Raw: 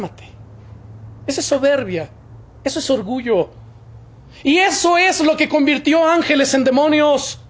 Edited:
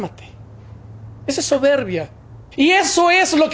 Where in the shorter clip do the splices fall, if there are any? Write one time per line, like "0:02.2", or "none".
0:02.5